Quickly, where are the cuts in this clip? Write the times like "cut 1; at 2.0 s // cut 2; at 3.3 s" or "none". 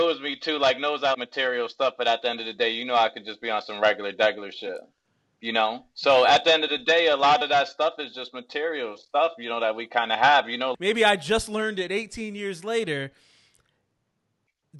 cut 1; at 1.1 s // cut 2; at 10.7 s

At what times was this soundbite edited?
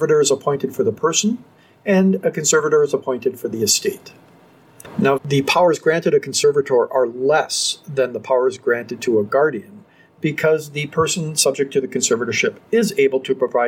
cut 1; at 5.2 s

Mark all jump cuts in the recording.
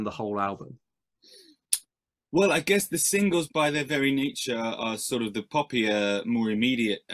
none

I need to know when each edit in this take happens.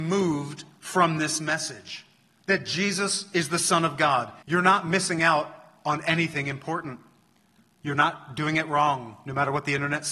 cut 1; at 4.4 s

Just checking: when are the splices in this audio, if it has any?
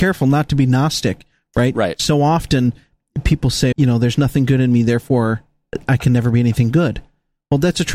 cut 1; at 3.7 s // cut 2; at 5.8 s

